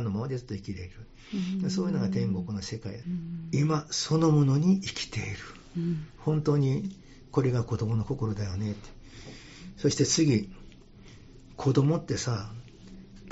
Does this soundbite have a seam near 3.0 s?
yes; 1 cut; at 3.0 s

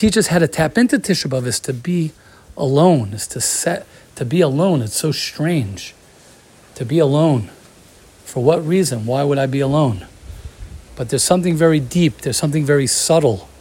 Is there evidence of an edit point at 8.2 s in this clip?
no; 1 cut; at 10.9 s

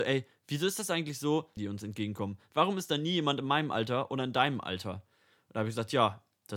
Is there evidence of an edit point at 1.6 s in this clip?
yes; 1 cut; at 1.6 s

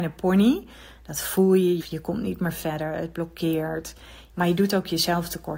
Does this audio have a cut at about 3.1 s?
no; 2 cuts; at 1.8 s, 4.3 s

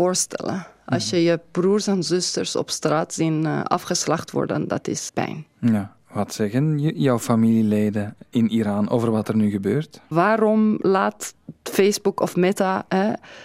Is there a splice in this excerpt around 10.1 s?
yes; 3 cuts; at 5.1 s, 8.3 s, 10.1 s

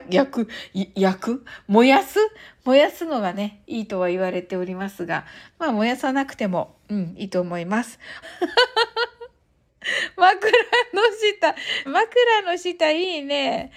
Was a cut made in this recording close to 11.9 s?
yes; 2 cuts; at 8.2 s, 11.9 s

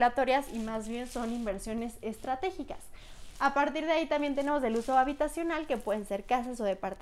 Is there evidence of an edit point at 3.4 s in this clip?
yes; 1 cut; at 3.4 s

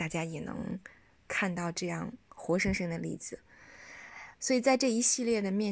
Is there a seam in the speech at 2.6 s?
no; 0 cuts

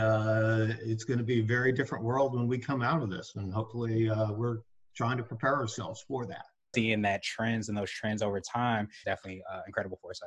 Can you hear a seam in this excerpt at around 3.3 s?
no; 2 cuts; at 6.7 s, 9.0 s

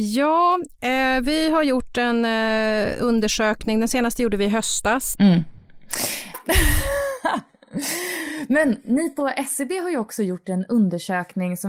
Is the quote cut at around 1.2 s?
no; 2 cuts; at 5.1 s, 6.3 s

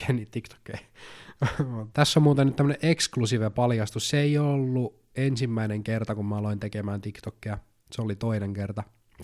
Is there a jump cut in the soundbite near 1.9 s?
yes; 1 cut; at 1.9 s

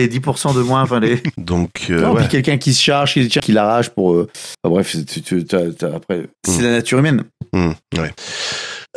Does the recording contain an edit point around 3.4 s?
yes; 2 cuts; at 1.4 s, 3.4 s

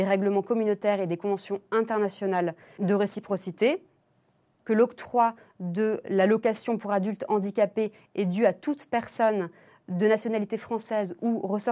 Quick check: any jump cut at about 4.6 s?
yes; 3 cuts; at 2.8 s, 4.6 s, 6.0 s

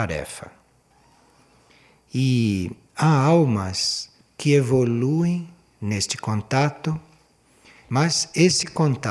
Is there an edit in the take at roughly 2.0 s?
no; 1 cut; at 7.8 s

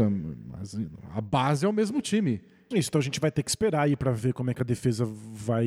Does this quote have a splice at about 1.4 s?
no; 1 cut; at 2.7 s

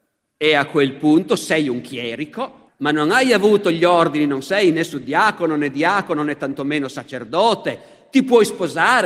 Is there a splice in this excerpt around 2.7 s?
yes; 1 cut; at 2.7 s

